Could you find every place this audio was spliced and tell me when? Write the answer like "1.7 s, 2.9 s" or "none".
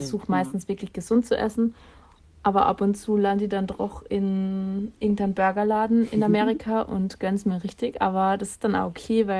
4.9 s

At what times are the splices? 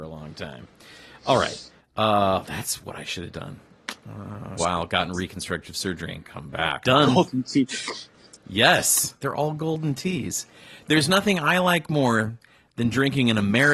4.6 s, 6.8 s, 9.2 s

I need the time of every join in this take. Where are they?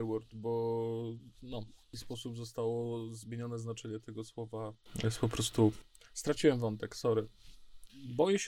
none

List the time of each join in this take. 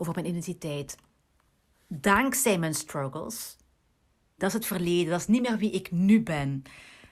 1.7 s, 4.4 s

